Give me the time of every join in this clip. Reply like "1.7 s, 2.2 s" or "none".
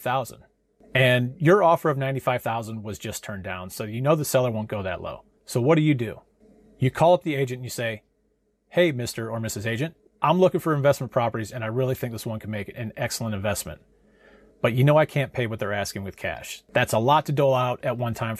10.1 s